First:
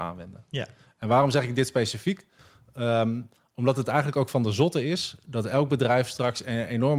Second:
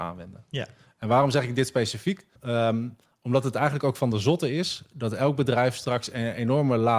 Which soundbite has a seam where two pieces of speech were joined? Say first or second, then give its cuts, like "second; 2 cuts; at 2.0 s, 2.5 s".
second; 1 cut; at 2.4 s